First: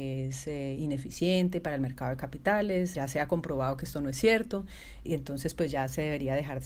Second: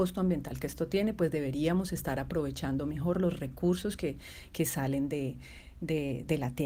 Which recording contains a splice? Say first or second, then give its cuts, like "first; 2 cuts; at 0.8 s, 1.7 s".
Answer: first; 2 cuts; at 2.9 s, 5.0 s